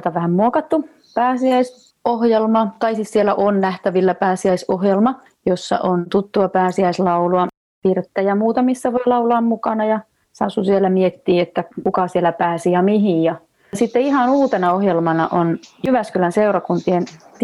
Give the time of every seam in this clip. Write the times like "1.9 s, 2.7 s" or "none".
none